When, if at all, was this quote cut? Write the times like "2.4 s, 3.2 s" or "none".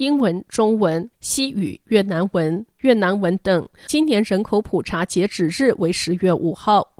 none